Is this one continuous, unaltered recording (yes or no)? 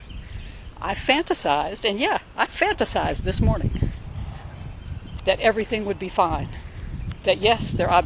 yes